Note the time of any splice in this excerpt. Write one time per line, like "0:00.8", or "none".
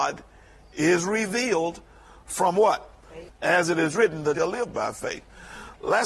0:03.3
0:04.3